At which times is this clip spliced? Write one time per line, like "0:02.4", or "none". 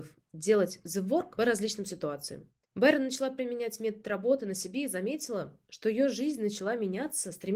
0:02.6